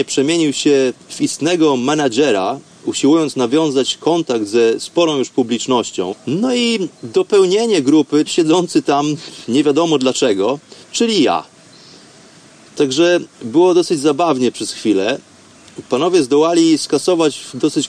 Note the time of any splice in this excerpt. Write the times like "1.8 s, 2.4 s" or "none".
6.1 s, 8.3 s, 10.8 s